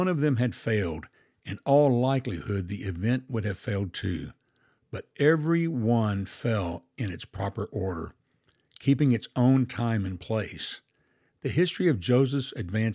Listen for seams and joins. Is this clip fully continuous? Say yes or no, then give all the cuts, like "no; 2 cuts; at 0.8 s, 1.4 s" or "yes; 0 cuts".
no; 1 cut; at 11.3 s